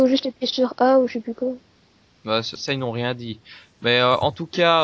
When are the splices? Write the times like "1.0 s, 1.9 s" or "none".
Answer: 2.6 s